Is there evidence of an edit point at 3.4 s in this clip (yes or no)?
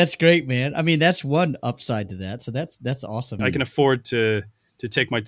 yes